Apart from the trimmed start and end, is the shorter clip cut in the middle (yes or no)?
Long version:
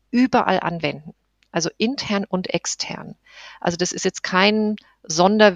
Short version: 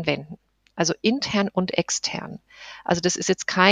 no